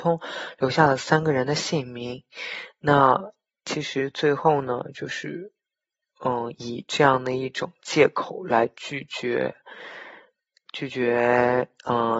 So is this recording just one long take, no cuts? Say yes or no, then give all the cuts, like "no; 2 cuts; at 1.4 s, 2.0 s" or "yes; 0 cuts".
yes; 0 cuts